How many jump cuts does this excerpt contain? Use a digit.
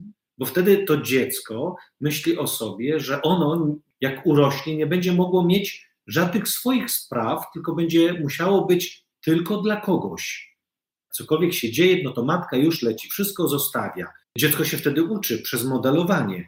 2